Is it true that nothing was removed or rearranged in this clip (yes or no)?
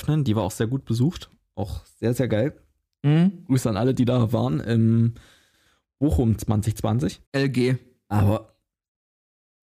no